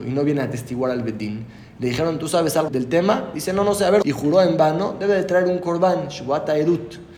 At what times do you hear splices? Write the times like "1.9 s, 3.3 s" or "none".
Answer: 2.7 s, 4.0 s